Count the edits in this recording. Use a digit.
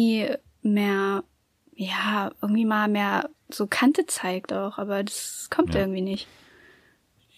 0